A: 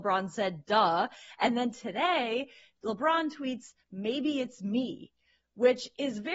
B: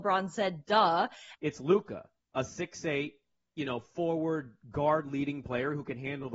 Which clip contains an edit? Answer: B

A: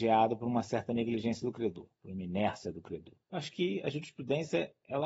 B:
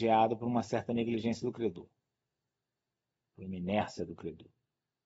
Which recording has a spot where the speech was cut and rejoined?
A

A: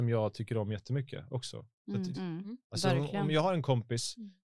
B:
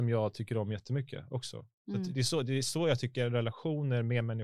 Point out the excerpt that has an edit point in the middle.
A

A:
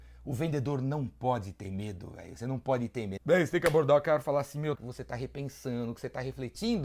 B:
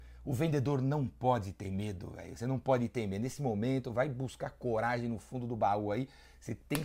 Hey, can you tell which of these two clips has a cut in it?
A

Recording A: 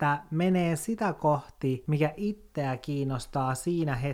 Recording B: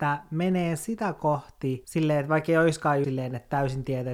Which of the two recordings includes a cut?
B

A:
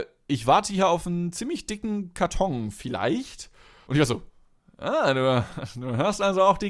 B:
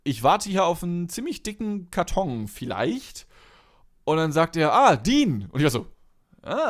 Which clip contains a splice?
A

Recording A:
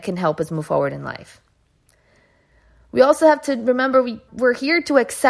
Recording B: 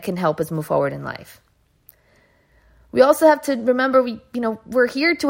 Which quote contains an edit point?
A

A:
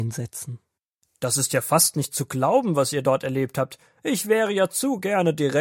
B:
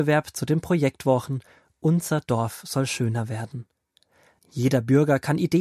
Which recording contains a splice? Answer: B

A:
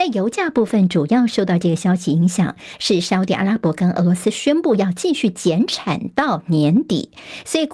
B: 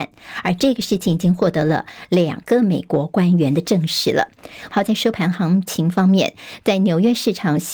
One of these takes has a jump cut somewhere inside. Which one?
B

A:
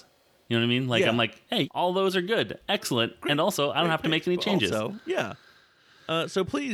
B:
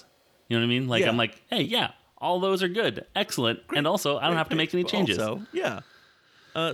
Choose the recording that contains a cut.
A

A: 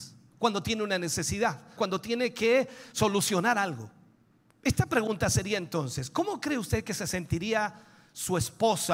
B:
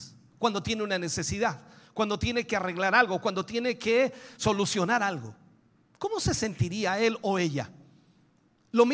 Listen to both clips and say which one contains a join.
A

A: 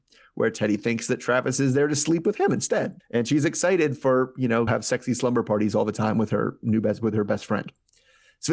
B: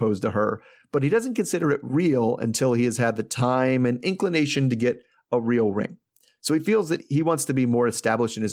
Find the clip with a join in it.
A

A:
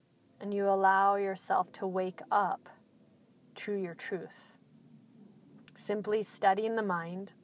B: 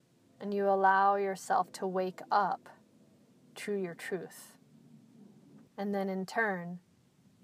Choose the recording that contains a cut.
B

